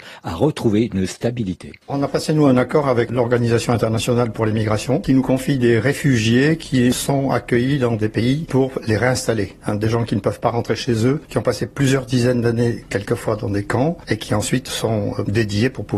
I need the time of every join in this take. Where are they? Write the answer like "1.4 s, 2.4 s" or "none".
1.8 s

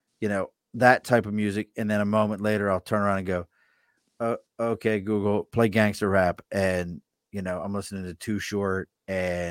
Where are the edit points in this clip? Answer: none

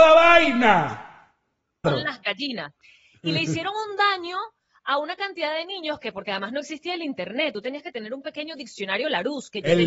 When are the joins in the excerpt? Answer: 1.8 s

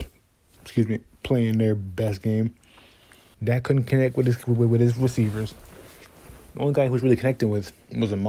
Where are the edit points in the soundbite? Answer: 3.3 s

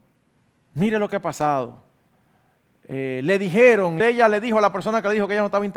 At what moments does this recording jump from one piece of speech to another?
4.0 s

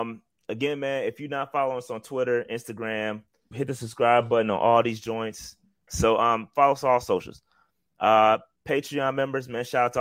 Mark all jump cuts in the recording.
3.5 s, 5.9 s

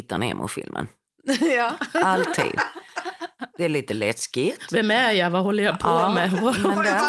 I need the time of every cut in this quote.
none

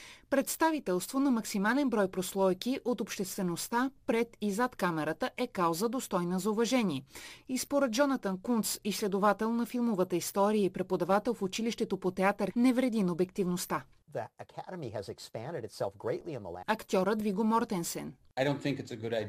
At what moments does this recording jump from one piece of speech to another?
12.5 s, 16.6 s

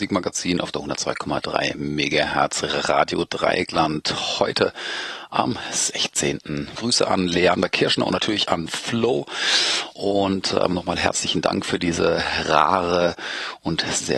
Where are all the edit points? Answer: 6.8 s

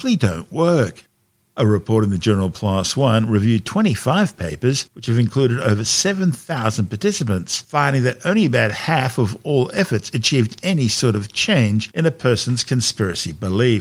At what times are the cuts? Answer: none

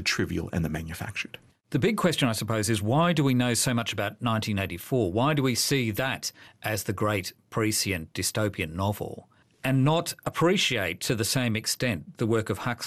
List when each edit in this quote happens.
none

